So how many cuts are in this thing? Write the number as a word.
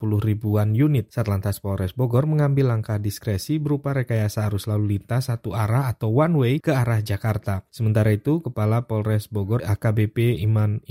one